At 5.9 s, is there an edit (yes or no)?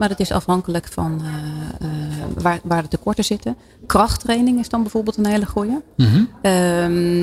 no